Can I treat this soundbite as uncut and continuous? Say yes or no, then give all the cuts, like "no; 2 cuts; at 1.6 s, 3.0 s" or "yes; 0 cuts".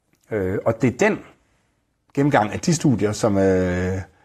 yes; 0 cuts